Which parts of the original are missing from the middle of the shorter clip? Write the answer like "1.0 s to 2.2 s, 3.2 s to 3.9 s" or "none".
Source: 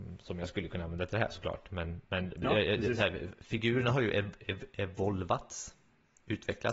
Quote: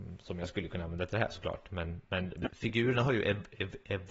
2.5 s to 3.3 s